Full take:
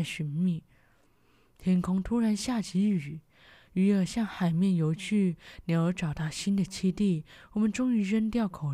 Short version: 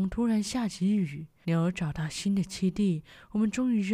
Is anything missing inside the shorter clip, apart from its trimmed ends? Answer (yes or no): yes